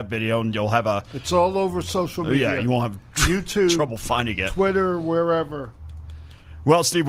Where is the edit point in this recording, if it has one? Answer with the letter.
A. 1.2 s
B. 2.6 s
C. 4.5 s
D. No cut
D